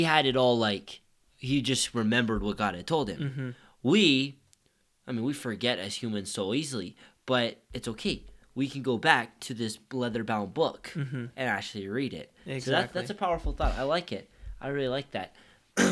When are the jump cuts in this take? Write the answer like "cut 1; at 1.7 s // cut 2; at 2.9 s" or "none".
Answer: none